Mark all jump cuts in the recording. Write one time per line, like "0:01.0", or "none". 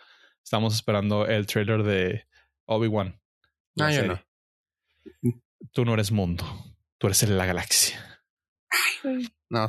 none